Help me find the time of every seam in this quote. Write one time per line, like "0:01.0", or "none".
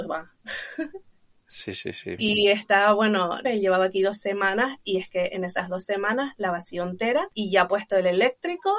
0:02.2
0:03.4